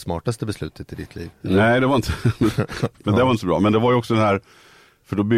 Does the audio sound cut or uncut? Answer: cut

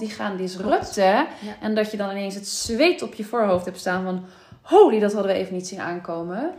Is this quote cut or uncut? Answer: uncut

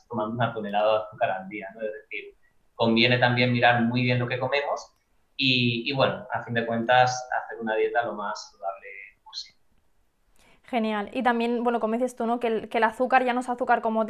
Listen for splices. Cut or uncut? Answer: uncut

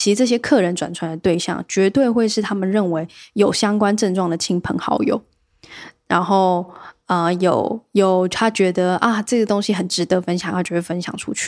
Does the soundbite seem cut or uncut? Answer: uncut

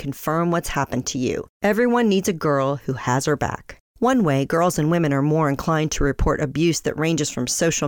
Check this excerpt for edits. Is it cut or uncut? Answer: cut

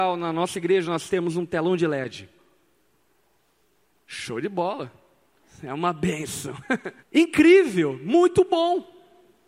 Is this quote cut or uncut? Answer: cut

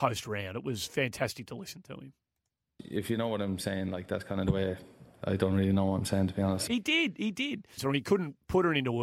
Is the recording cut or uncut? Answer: cut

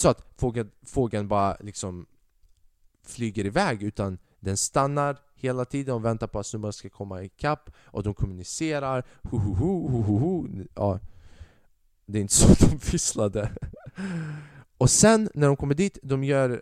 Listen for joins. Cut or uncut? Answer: uncut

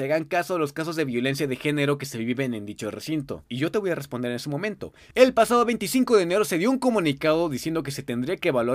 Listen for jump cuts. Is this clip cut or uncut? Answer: cut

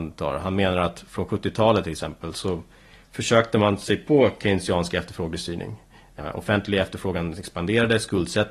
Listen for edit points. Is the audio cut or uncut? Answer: uncut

